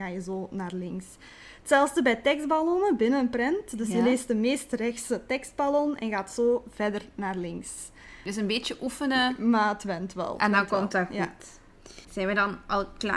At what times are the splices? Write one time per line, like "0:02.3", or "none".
0:12.0